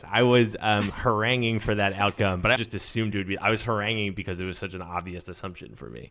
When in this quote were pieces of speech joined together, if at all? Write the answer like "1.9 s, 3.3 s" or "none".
2.6 s